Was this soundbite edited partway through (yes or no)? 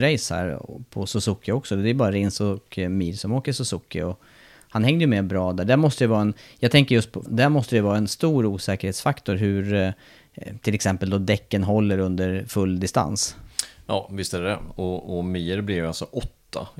yes